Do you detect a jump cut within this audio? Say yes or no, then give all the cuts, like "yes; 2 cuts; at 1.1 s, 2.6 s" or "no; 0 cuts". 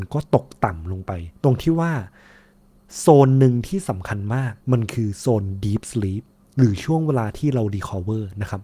yes; 2 cuts; at 1.4 s, 4.6 s